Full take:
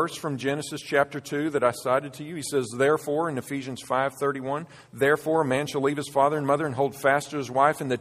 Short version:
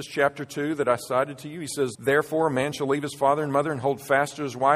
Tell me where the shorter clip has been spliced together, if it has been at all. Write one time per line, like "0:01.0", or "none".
0:01.9